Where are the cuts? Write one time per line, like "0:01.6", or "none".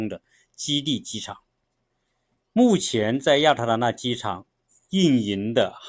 none